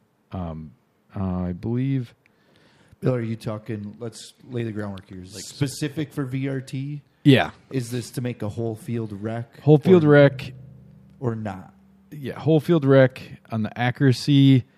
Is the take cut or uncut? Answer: cut